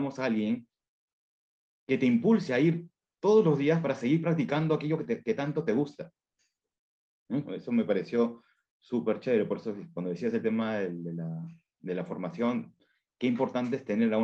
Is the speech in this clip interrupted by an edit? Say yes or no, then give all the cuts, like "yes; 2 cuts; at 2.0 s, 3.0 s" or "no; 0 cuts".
yes; 1 cut; at 7.5 s